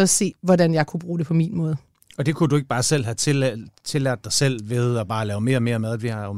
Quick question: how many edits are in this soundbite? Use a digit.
0